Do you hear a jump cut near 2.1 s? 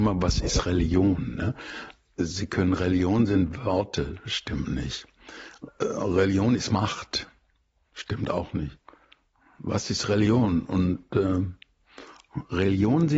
no; 0 cuts

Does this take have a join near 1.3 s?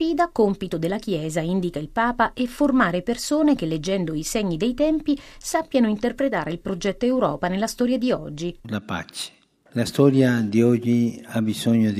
no; 1 cut; at 8.6 s

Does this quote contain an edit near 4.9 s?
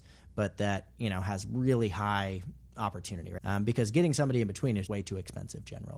yes; 2 cuts; at 3.4 s, 4.9 s

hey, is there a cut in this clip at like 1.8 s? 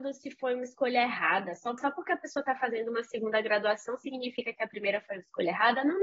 yes; 1 cut; at 1.8 s

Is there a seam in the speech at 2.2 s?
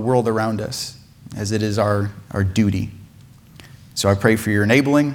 yes; 1 cut; at 2.2 s

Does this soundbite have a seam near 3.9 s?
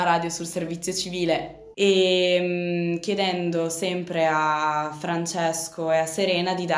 no; 1 cut; at 1.7 s

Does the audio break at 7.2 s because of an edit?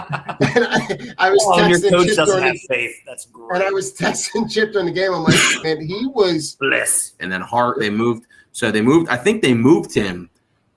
yes; 2 cuts; at 5.6 s, 7.2 s

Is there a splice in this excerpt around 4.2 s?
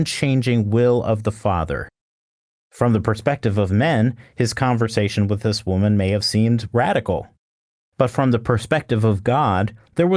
no; 0 cuts

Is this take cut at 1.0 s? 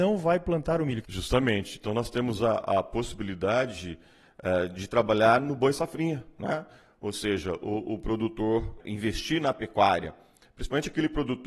yes; 1 cut; at 1.0 s

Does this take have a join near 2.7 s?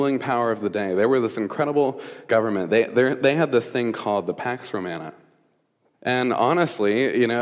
no; 1 cut; at 5.9 s

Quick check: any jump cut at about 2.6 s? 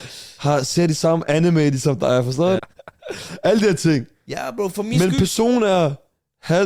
yes; 2 cuts; at 2.6 s, 4.7 s

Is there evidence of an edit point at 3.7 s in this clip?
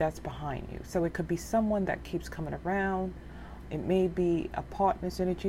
yes; 1 cut; at 3.7 s

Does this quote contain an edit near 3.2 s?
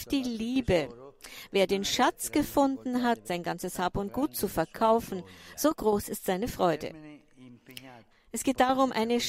yes; 2 cuts; at 3.2 s, 8.1 s

